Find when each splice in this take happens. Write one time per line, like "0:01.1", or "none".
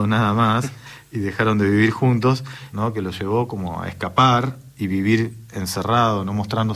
0:02.7